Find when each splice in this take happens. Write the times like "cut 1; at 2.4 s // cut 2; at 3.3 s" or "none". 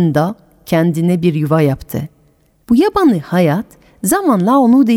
cut 1; at 2.6 s